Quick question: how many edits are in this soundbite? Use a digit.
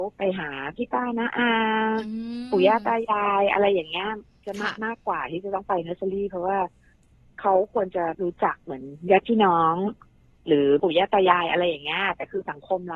0